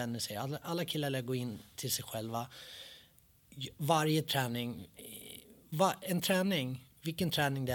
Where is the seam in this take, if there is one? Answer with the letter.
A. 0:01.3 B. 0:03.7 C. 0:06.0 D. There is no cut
D